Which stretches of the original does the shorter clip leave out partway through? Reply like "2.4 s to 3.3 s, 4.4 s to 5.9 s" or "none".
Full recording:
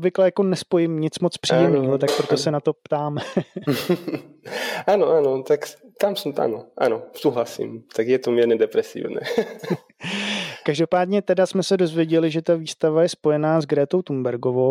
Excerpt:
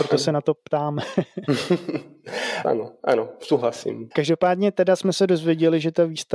4.8 s to 6.4 s, 7.8 s to 10.6 s